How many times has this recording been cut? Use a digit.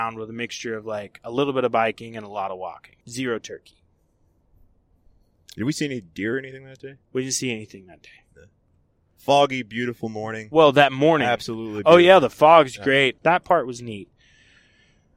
2